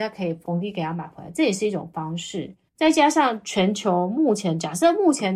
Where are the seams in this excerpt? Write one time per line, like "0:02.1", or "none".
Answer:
0:02.7